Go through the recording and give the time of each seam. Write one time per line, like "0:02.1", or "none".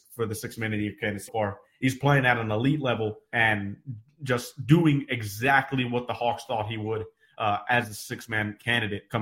0:01.3